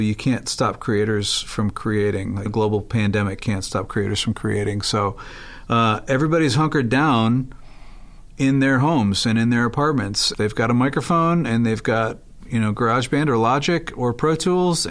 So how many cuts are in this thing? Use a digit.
2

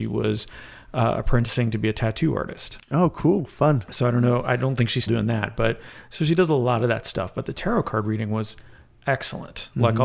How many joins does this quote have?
1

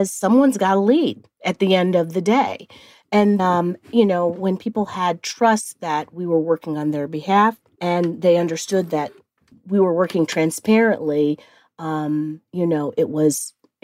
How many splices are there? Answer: 2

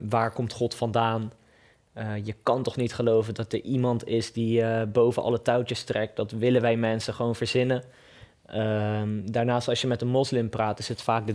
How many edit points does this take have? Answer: 0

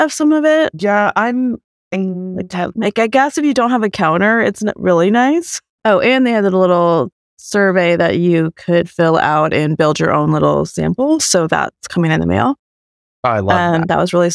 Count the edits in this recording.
1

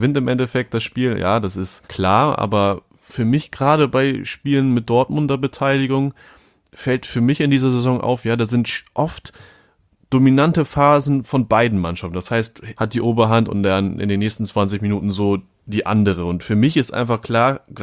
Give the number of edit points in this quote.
2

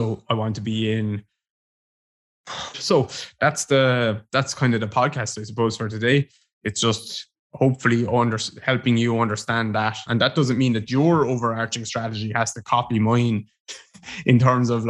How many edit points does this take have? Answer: 2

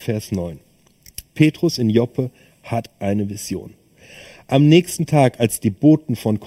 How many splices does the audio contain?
0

